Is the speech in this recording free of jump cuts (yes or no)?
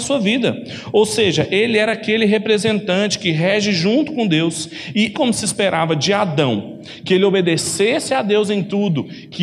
no